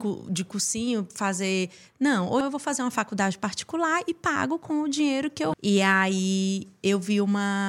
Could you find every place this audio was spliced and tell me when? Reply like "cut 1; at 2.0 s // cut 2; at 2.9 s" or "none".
cut 1; at 2.4 s // cut 2; at 5.5 s